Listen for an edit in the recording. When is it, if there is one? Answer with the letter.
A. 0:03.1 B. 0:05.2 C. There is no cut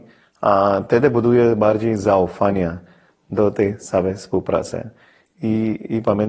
C